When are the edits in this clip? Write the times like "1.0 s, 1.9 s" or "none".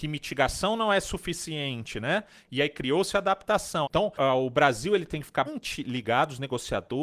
3.8 s, 5.5 s